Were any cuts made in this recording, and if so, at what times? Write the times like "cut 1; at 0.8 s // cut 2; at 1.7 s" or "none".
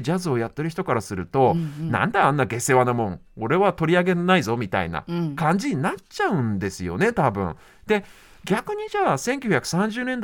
none